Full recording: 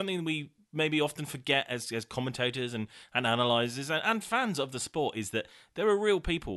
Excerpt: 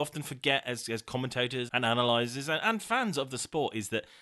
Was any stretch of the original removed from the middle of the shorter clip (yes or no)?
yes